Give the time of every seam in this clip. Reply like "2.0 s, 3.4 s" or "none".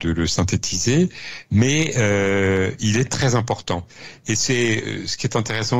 none